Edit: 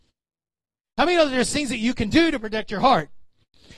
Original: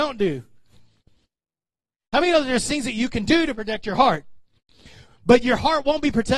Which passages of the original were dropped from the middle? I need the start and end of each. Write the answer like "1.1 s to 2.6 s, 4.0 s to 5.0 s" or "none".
none